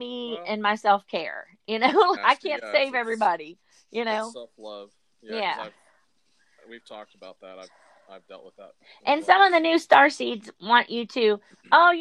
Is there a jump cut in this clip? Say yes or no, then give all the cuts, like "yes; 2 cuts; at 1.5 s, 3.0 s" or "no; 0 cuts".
yes; 1 cut; at 2.2 s